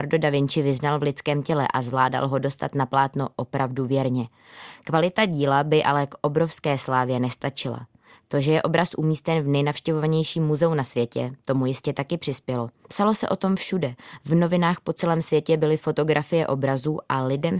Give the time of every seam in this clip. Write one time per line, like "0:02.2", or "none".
0:12.8